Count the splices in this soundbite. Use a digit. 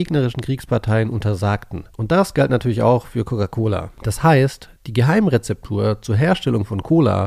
0